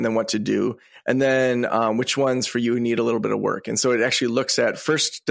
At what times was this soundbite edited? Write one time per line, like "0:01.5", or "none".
none